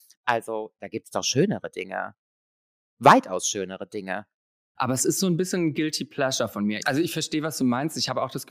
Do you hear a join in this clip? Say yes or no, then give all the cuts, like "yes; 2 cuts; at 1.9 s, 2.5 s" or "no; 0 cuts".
yes; 2 cuts; at 4.8 s, 6.8 s